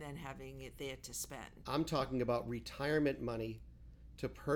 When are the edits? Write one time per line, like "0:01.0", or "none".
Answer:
0:01.6